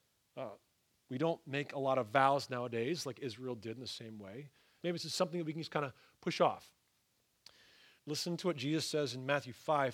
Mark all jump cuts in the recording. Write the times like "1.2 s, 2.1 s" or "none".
4.8 s, 8.0 s